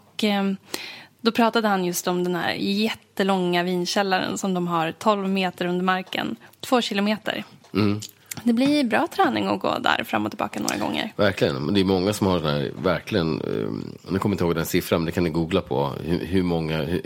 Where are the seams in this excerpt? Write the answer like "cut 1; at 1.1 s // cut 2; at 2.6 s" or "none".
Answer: none